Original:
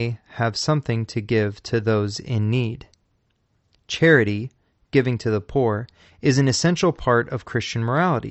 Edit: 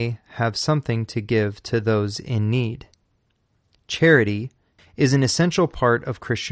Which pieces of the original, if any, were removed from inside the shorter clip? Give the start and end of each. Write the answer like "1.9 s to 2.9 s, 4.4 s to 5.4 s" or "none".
4.8 s to 6.0 s